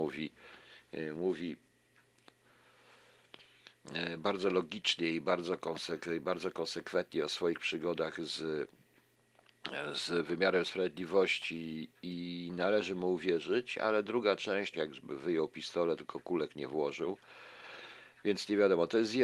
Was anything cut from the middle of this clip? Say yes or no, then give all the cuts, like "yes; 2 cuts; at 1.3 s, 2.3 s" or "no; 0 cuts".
yes; 1 cut; at 14.7 s